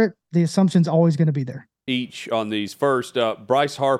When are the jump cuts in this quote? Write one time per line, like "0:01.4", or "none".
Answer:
0:01.9